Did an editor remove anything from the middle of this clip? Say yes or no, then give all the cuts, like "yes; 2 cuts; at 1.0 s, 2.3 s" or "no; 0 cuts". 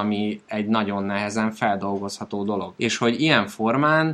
no; 0 cuts